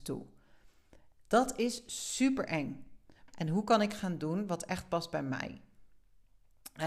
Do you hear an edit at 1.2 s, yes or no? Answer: no